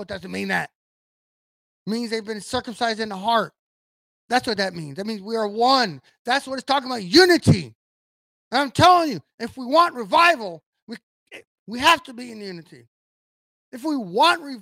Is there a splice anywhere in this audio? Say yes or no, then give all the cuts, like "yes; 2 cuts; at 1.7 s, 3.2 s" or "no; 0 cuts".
no; 0 cuts